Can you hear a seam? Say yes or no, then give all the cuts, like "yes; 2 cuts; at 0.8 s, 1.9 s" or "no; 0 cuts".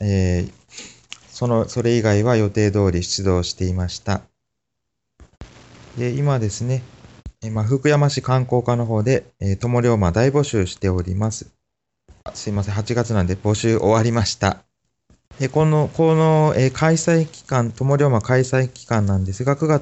no; 0 cuts